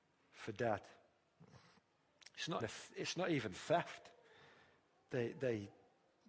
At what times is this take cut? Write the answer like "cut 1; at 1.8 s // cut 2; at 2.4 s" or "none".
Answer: cut 1; at 2.6 s